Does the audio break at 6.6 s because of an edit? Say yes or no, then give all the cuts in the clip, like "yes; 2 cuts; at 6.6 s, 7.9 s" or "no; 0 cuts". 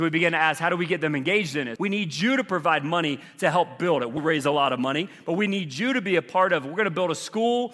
no; 2 cuts; at 1.8 s, 4.2 s